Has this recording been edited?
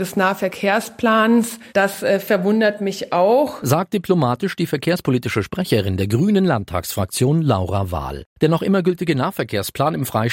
yes; 1 cut; at 1.7 s

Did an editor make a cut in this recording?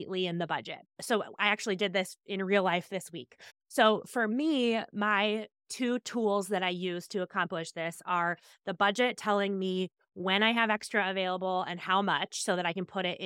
yes; 1 cut; at 3.5 s

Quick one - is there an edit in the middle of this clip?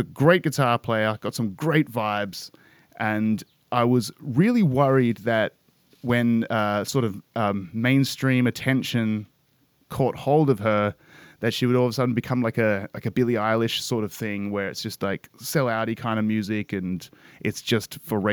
no; 0 cuts

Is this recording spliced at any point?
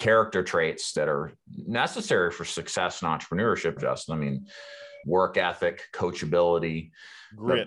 yes; 2 cuts; at 3.8 s, 5.0 s

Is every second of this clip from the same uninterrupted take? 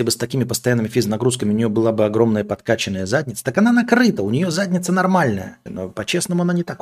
no; 1 cut; at 5.7 s

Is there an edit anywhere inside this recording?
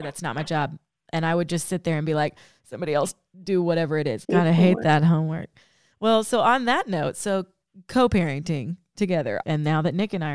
yes; 2 cuts; at 4.2 s, 9.4 s

